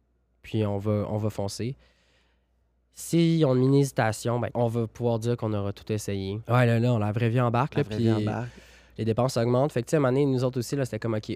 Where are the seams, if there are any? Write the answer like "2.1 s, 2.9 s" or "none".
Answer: 4.5 s, 6.4 s